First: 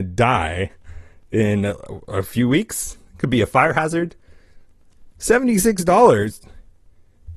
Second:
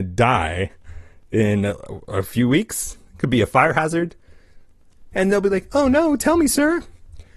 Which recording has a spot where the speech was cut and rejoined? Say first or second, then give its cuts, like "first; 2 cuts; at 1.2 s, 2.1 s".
second; 1 cut; at 5.1 s